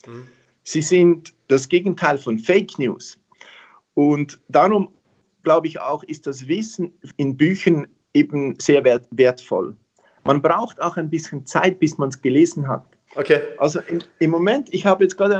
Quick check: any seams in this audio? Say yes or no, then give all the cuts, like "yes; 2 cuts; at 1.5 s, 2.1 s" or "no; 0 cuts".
yes; 1 cut; at 13.1 s